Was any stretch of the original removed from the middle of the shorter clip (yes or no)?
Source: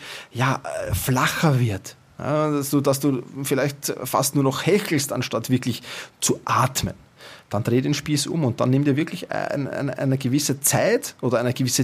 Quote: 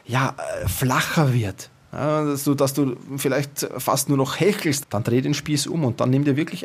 yes